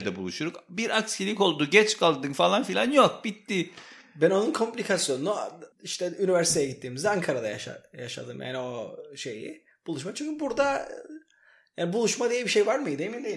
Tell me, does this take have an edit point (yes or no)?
yes